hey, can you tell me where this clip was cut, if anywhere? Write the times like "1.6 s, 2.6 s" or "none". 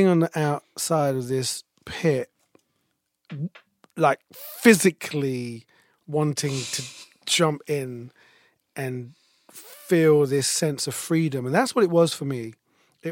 none